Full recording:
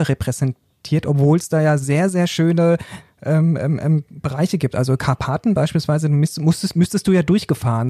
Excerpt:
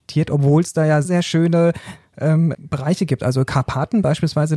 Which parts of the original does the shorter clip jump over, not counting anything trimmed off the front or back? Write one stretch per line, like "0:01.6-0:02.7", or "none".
0:01.8-0:02.1
0:03.6-0:04.1